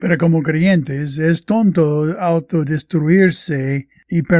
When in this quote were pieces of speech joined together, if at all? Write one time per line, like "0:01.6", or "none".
none